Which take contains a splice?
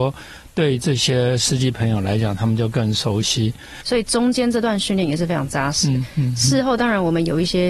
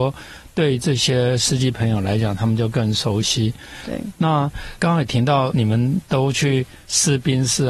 first; 1 cut; at 3.8 s

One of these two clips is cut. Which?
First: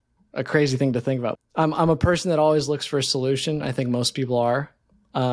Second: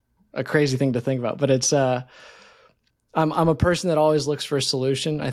first; 1 cut; at 1.3 s

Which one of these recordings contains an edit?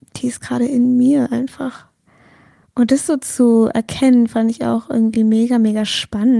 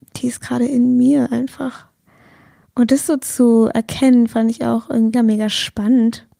second; 1 cut; at 5.1 s

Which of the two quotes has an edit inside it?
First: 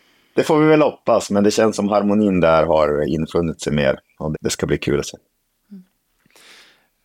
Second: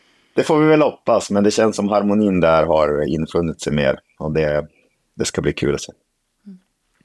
first; 1 cut; at 4.3 s

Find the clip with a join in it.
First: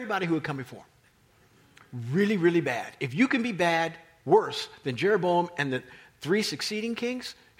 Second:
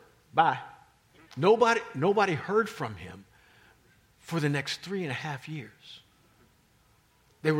second; 1 cut; at 1.3 s

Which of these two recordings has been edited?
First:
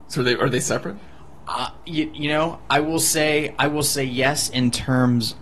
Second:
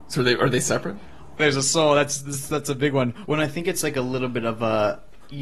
second; 2 cuts; at 1.4 s, 3.3 s

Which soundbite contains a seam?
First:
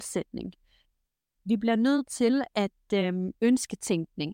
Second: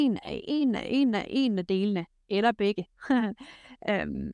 first; 1 cut; at 3.3 s

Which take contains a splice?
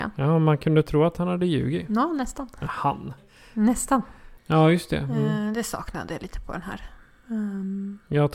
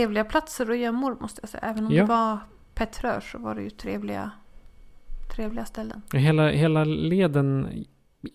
first; 2 cuts; at 3.2 s, 4.4 s

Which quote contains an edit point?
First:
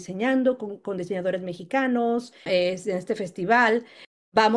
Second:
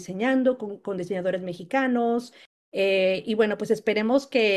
first; 1 cut; at 2.5 s

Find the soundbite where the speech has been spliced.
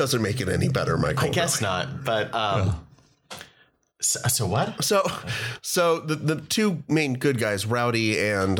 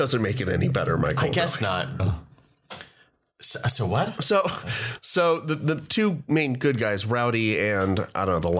second; 1 cut; at 2.0 s

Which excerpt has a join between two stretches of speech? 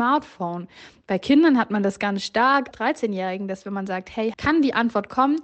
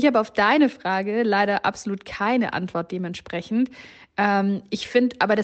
first; 2 cuts; at 2.7 s, 4.3 s

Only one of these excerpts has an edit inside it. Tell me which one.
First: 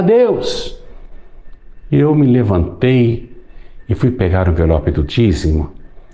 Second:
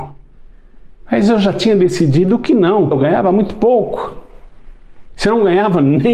second; 2 cuts; at 2.9 s, 5.1 s

